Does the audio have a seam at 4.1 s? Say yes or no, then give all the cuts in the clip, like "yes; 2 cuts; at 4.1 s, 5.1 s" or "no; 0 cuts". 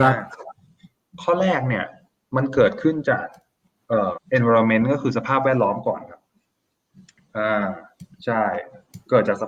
yes; 1 cut; at 4.1 s